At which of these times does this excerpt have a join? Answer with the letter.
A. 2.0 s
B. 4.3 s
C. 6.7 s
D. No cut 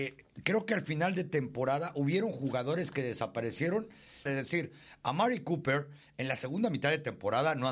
B